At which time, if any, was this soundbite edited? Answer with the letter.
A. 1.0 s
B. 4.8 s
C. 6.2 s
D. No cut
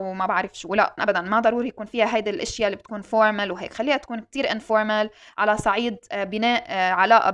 A